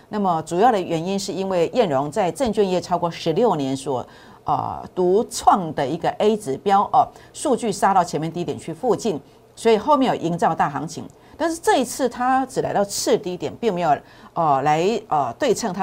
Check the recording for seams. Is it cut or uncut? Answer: uncut